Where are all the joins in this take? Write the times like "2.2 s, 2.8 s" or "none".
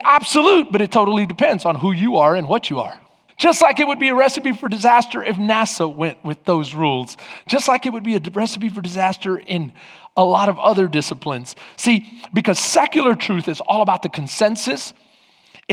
3.3 s